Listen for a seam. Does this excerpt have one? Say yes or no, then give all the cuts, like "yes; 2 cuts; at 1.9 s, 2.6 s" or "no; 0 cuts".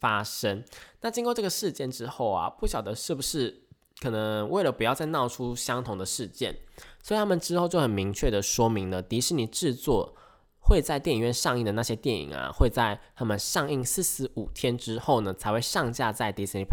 no; 0 cuts